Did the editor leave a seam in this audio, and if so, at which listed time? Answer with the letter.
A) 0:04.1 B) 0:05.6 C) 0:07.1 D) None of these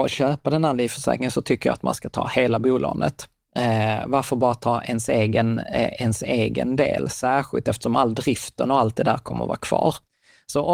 D